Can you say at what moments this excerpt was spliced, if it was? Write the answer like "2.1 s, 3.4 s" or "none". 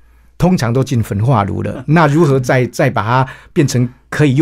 none